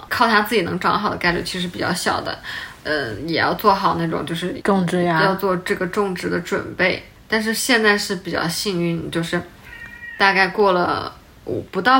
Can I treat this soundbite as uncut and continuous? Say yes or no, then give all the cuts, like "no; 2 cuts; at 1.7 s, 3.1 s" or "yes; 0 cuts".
yes; 0 cuts